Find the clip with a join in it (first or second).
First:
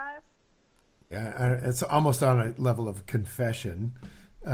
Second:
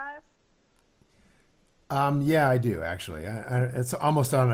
first